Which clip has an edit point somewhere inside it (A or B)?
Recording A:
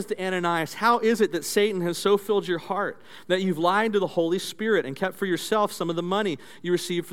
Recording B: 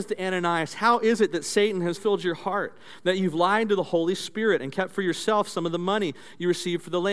B